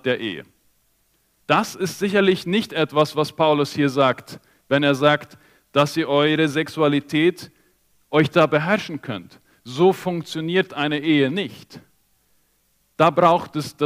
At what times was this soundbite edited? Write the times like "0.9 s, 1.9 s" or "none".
1.4 s